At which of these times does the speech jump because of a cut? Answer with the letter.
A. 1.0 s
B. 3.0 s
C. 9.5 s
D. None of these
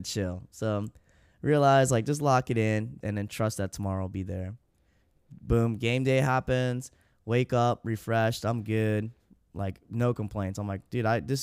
B